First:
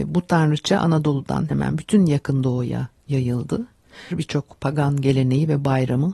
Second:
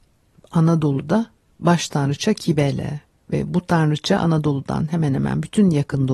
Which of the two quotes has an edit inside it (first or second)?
first